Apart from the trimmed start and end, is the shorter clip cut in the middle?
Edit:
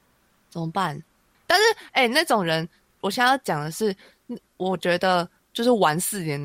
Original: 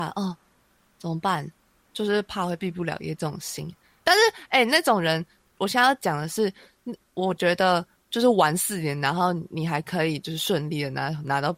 yes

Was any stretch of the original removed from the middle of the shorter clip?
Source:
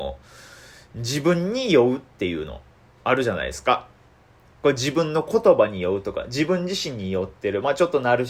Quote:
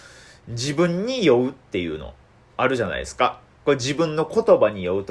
yes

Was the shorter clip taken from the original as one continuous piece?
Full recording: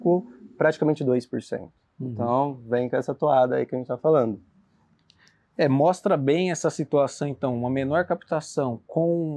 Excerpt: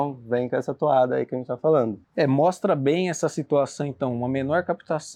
no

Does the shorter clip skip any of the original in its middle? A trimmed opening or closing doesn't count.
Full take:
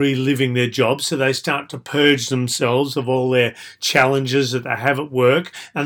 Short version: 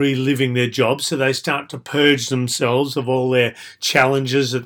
no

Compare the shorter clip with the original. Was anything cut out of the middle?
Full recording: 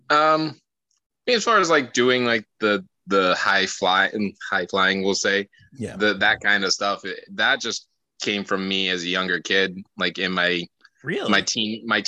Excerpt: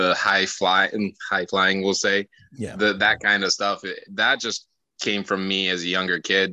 no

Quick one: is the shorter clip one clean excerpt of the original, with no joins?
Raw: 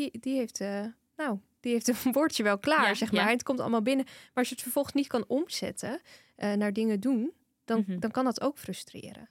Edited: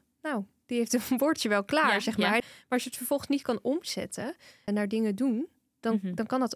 no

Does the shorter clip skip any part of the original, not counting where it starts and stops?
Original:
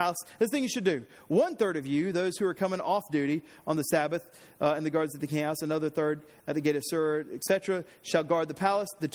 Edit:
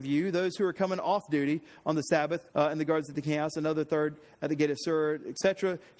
yes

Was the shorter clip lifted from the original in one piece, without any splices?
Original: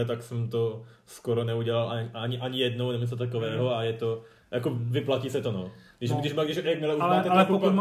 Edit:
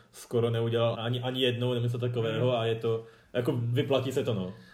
no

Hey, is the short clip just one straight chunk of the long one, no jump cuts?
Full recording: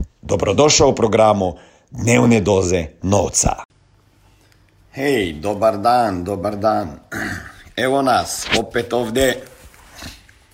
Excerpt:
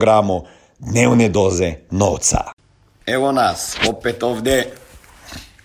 no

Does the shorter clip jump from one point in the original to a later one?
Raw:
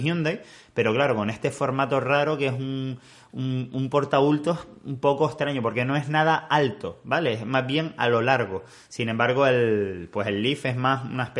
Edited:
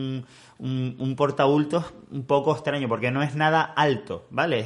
no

